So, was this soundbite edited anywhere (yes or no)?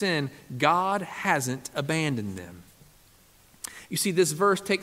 yes